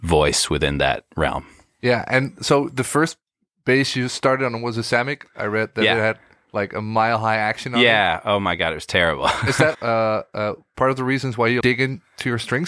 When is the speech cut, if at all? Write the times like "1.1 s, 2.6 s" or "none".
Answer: 9.7 s, 11.6 s